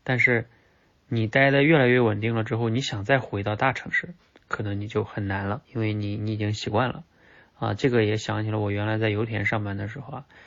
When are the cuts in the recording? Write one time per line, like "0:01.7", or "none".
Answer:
0:05.6